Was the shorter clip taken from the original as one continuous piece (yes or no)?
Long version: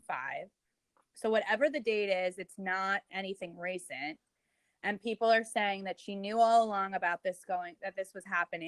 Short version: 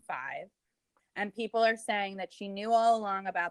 no